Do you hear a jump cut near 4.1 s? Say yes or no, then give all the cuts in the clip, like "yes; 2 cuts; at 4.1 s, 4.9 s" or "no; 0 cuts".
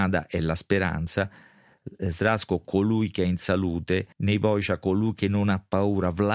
yes; 1 cut; at 4.1 s